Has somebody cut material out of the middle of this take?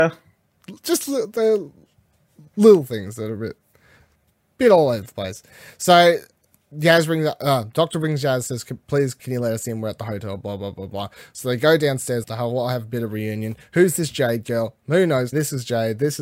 yes; 3 cuts; at 9.2 s, 12.2 s, 15.3 s

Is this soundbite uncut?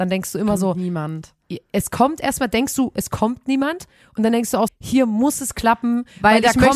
no; 1 cut; at 4.7 s

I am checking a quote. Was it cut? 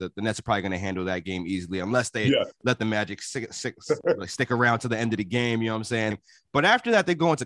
yes; 1 cut; at 6.1 s

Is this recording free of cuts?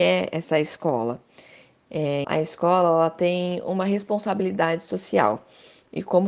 no; 1 cut; at 2.2 s

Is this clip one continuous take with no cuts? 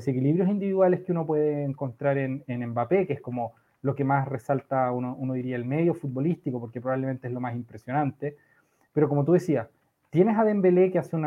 yes; 0 cuts

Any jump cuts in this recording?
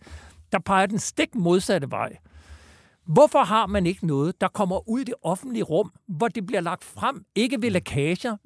no; 0 cuts

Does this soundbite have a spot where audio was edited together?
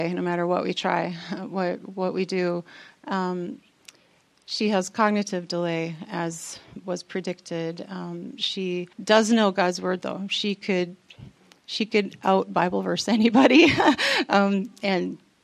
yes; 1 cut; at 8.9 s

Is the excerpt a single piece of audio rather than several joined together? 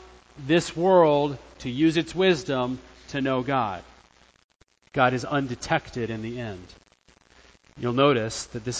no; 1 cut; at 4.9 s

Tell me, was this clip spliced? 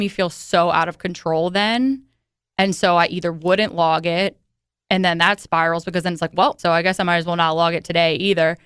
yes; 1 cut; at 6.6 s

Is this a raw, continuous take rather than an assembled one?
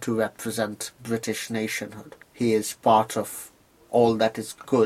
no; 1 cut; at 2.2 s

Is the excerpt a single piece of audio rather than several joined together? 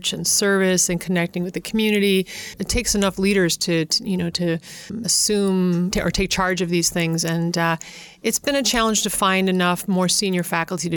yes; 0 cuts

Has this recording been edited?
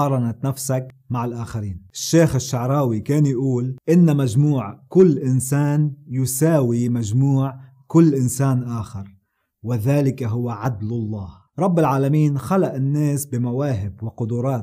no; 0 cuts

